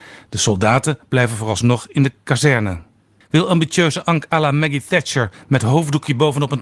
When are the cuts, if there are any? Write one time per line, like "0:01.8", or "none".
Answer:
0:03.2